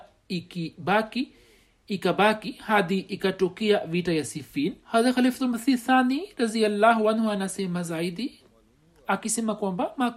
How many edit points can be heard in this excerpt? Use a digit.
1